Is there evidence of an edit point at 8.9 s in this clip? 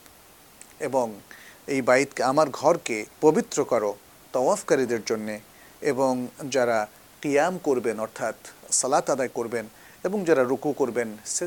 no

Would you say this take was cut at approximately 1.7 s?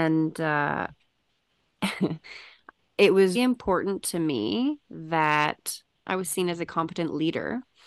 no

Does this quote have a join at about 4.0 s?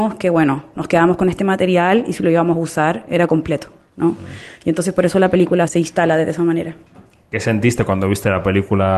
no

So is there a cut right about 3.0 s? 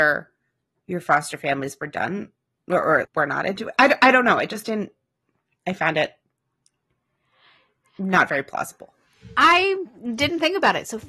yes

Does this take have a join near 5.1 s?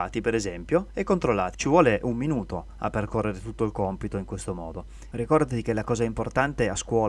yes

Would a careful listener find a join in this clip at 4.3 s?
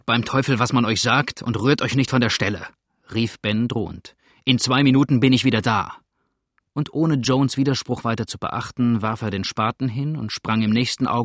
no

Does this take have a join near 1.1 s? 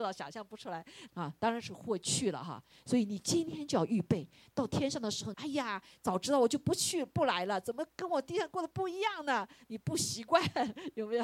yes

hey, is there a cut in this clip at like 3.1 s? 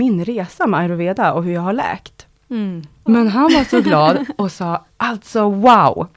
yes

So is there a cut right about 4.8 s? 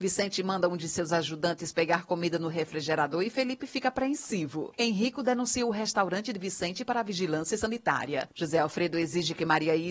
no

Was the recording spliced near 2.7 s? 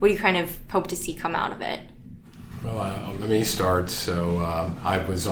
no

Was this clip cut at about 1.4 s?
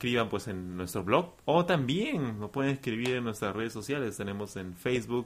yes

